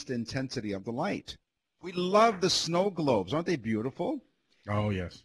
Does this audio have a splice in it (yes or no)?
yes